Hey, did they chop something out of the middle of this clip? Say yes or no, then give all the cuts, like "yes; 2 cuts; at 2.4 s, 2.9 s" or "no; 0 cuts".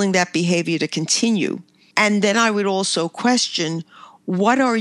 yes; 1 cut; at 1.9 s